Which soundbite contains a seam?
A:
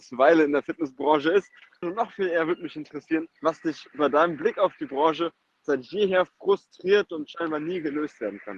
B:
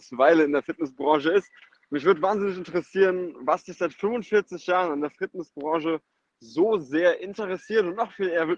A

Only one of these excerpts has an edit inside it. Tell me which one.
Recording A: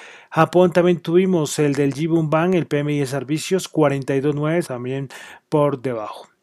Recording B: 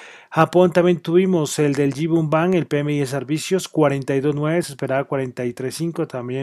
A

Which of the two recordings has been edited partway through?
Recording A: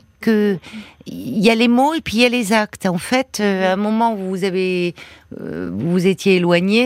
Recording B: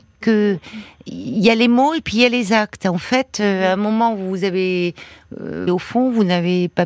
B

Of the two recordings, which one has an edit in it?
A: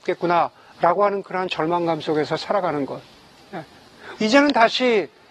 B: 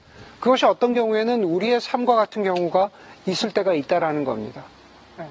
A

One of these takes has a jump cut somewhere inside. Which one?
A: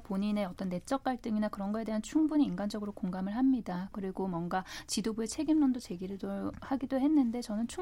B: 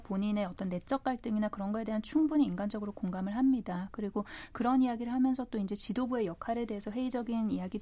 A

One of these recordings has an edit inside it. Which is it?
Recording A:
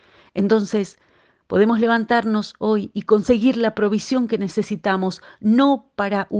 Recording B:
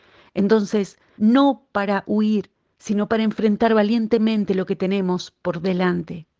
B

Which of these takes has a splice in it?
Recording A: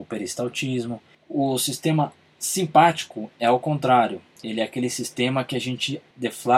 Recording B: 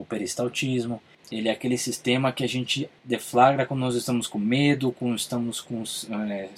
B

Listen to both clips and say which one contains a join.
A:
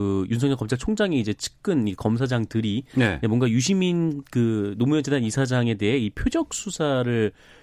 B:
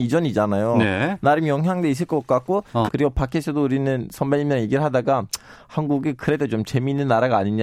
B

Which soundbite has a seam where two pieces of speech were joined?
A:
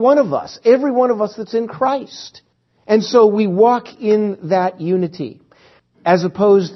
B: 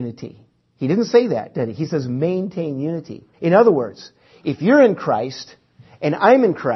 B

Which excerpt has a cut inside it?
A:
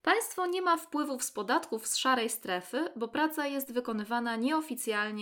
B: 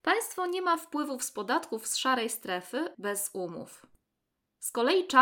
B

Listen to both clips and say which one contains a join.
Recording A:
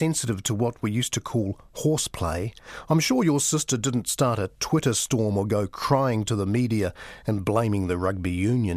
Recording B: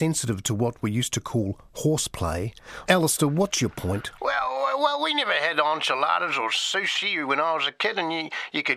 B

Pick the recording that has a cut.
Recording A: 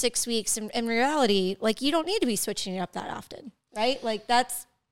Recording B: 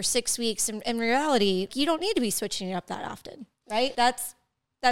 B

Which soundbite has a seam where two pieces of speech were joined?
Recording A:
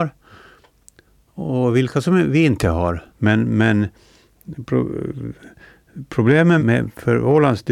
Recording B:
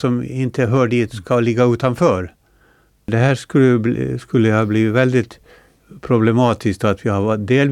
A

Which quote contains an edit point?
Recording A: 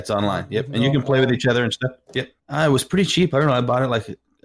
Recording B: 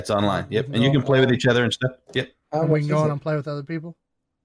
A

